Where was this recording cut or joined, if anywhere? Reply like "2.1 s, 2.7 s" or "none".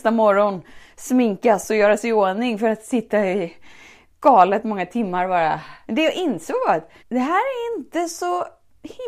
5.9 s, 7.0 s